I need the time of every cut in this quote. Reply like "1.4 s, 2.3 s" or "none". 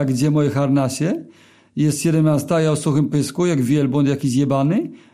none

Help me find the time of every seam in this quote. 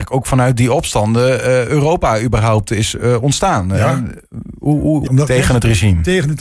5.1 s

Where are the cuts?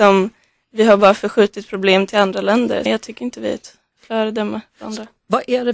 2.9 s

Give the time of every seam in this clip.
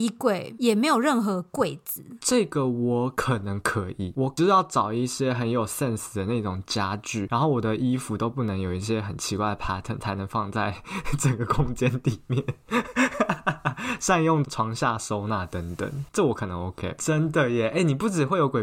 17.0 s

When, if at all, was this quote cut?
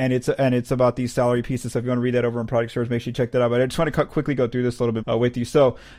5.0 s

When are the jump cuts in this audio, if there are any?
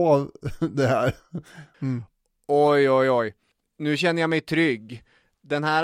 1.7 s

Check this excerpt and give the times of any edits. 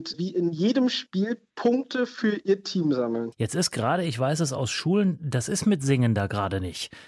3.3 s

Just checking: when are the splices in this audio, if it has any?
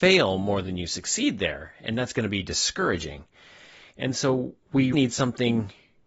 4.9 s

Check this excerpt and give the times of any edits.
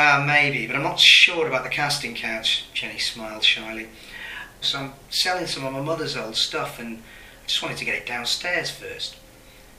4.6 s

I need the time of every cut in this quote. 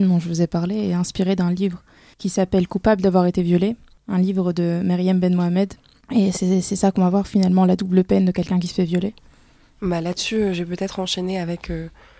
none

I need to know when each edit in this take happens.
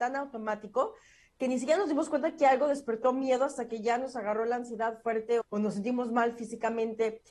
5.4 s

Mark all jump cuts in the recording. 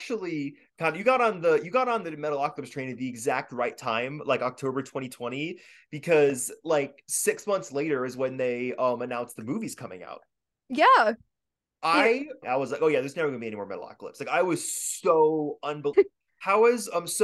12.4 s, 15.9 s

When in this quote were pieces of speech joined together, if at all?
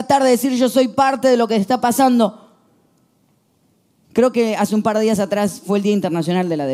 none

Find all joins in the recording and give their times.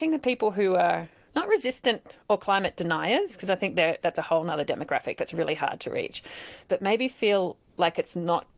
6.7 s

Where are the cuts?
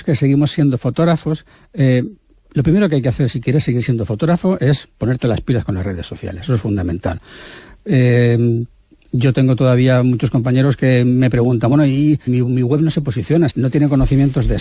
12.3 s, 13.5 s

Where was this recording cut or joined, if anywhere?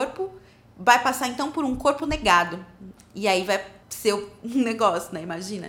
3.8 s

